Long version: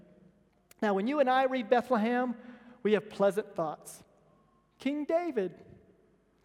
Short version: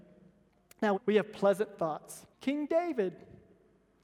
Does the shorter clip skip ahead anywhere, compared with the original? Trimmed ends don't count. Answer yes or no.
yes